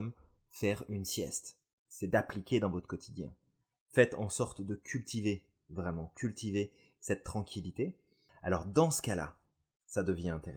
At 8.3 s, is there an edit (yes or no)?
yes